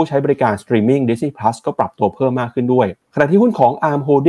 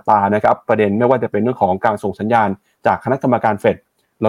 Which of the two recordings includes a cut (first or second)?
first